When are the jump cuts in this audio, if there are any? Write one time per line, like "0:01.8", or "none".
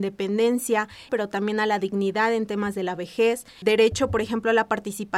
0:01.1
0:03.6